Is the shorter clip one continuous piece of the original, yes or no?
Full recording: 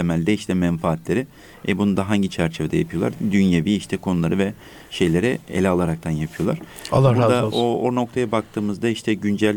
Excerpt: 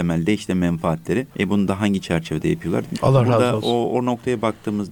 no